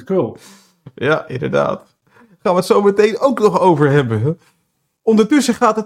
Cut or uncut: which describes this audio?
uncut